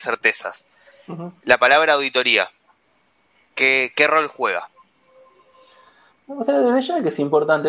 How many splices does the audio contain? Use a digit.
0